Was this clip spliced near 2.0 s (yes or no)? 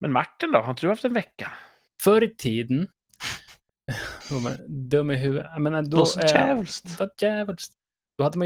yes